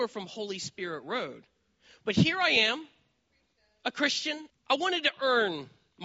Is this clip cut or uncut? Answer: cut